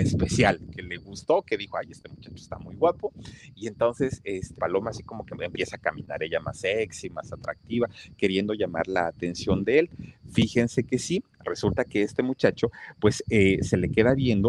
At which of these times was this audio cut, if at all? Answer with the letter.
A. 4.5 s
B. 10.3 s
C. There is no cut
A